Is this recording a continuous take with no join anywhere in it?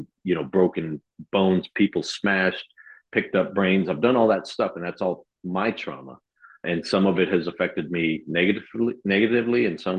no; 1 cut; at 6.6 s

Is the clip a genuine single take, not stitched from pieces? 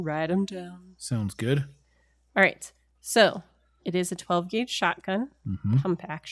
no; 1 cut; at 3.8 s

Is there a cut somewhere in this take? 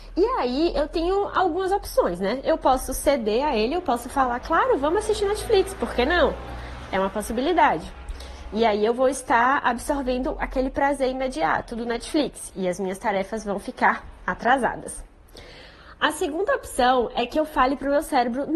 no; 0 cuts

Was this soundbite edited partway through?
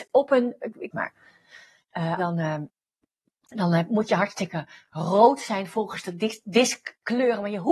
yes; 2 cuts; at 0.9 s, 2.2 s

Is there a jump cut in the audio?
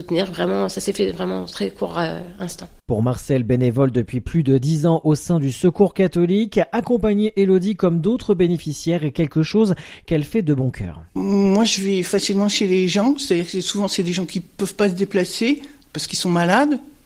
no; 0 cuts

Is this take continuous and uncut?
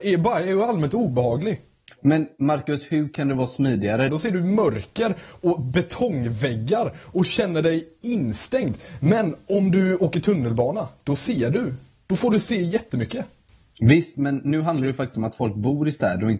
no; 1 cut; at 4.1 s

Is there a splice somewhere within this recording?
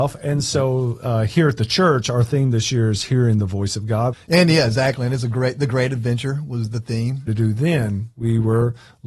yes; 2 cuts; at 4.1 s, 7.3 s

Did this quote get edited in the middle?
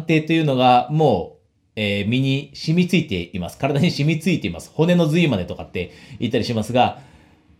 no; 0 cuts

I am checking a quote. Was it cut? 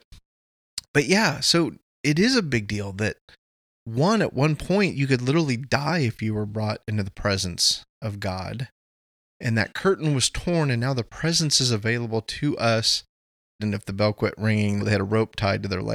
yes; 2 cuts; at 13.6 s, 14.8 s

